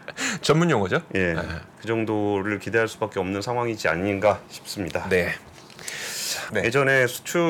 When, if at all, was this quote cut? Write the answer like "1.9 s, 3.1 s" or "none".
6.5 s